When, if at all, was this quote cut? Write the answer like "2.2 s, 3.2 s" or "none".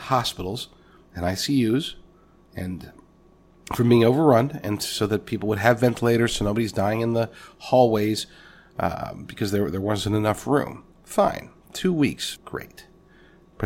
12.4 s